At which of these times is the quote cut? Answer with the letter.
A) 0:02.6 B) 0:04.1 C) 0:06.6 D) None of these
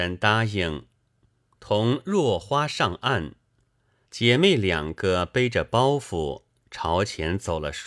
B